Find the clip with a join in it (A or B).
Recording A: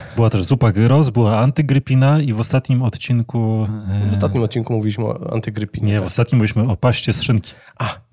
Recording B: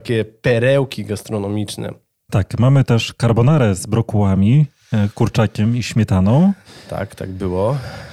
B